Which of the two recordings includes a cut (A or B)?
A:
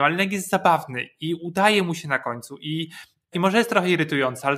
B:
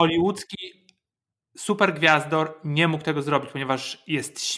A